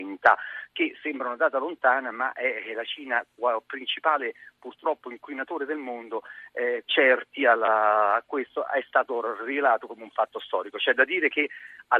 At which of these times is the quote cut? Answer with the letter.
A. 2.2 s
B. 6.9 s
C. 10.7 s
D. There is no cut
B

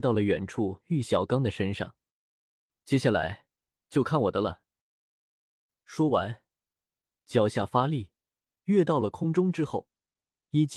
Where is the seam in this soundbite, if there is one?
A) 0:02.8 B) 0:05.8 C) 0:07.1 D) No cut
C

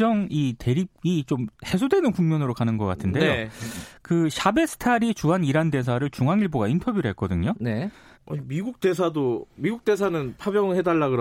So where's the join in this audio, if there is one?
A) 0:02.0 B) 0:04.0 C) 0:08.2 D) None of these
C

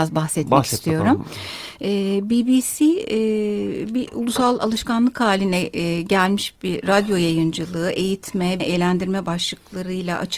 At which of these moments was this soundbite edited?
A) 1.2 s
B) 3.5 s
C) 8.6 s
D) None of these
C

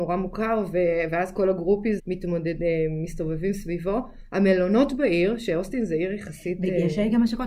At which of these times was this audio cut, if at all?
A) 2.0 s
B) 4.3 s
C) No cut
A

